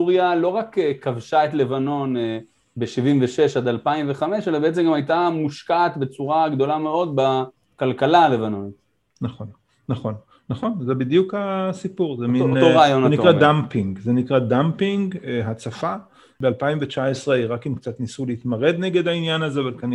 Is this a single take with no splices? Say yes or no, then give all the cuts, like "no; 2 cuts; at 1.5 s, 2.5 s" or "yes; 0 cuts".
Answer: yes; 0 cuts